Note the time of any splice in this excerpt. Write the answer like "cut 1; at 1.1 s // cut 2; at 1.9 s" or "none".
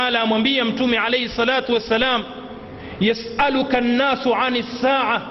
none